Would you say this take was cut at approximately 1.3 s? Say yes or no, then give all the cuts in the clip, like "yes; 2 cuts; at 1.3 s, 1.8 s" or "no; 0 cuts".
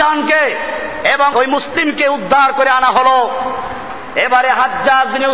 yes; 1 cut; at 1.3 s